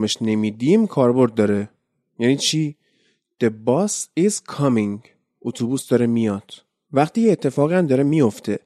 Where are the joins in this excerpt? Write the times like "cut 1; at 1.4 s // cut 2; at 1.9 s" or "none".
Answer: cut 1; at 6.8 s